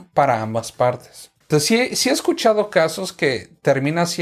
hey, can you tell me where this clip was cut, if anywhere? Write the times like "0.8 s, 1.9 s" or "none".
1.4 s